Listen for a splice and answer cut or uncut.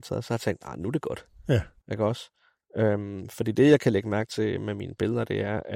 uncut